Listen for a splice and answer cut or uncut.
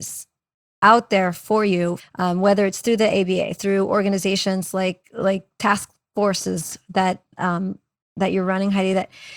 cut